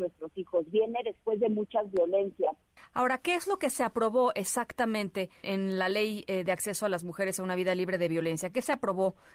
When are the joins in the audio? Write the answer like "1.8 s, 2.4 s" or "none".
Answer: 2.8 s, 5.4 s